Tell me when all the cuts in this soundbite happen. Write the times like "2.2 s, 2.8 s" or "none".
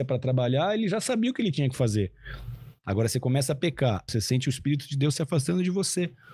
2.8 s, 4.1 s